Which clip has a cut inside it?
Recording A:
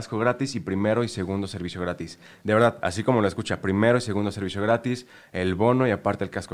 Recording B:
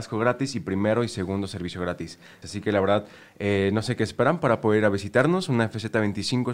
B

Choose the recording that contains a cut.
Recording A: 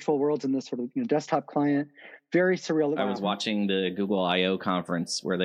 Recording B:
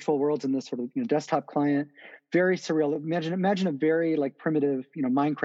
A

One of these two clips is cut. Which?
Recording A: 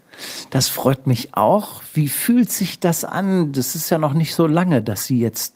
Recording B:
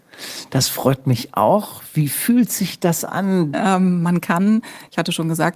B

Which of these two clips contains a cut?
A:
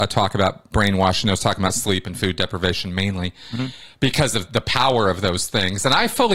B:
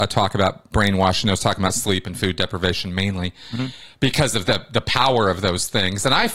A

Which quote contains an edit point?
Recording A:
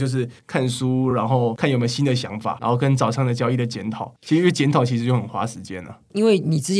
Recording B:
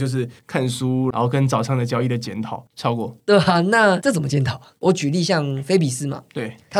B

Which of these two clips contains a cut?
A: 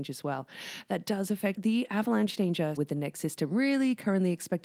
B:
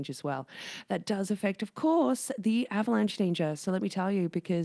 A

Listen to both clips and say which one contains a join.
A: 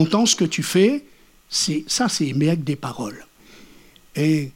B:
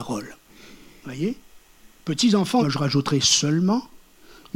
B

